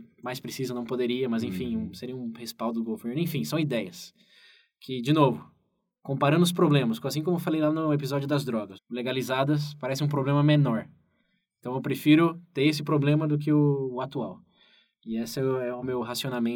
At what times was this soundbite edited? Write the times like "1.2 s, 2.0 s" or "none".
8.8 s